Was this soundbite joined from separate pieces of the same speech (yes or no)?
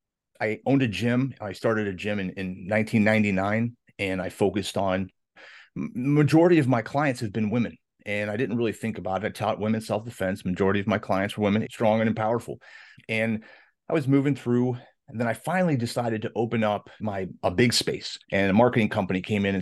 yes